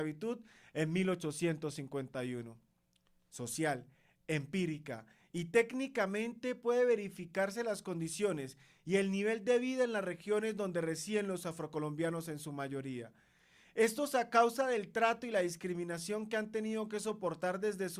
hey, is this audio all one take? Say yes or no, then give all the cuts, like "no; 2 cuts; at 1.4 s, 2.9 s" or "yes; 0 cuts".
yes; 0 cuts